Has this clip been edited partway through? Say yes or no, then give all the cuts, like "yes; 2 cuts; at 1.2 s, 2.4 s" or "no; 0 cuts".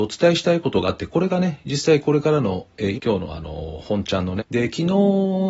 yes; 2 cuts; at 2.9 s, 4.4 s